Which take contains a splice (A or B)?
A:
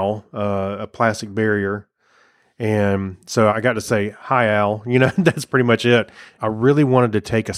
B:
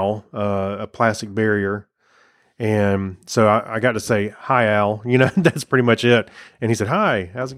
A